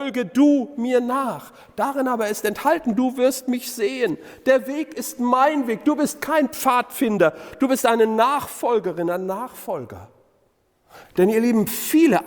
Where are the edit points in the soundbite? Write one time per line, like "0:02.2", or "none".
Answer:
0:11.0

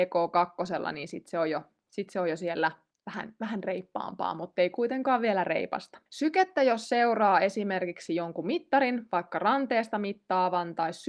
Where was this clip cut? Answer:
0:06.1

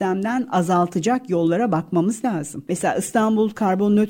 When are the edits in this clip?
0:02.7

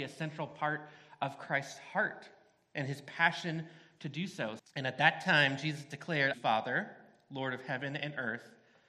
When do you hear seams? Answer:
0:04.6
0:06.3

